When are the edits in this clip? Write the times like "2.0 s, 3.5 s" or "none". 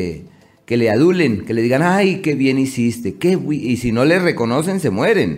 none

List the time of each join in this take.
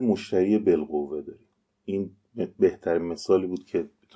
none

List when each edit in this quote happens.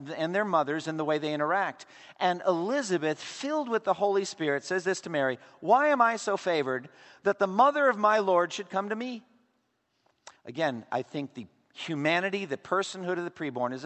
10.3 s

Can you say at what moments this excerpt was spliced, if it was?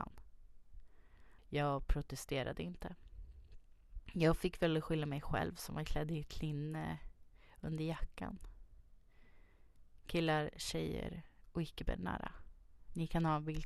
1.4 s

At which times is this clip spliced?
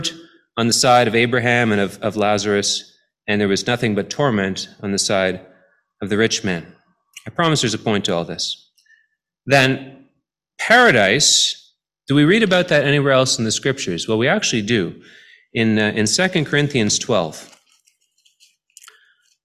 none

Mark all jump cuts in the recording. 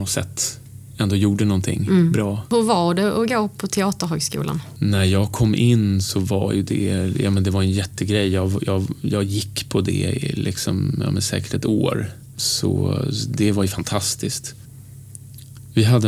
none

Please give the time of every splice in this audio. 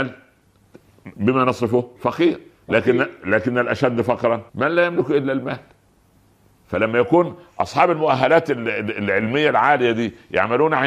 2.0 s, 4.5 s

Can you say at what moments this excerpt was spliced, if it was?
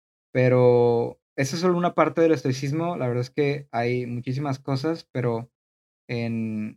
none

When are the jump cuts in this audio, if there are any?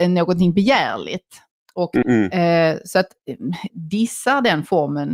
2.0 s, 3.7 s

